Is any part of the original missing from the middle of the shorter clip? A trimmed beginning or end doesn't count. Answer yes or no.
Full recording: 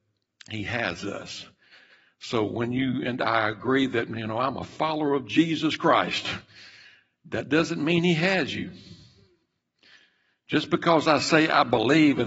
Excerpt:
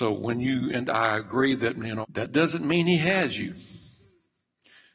yes